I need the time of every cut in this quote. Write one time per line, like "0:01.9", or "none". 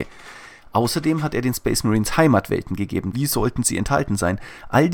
0:03.1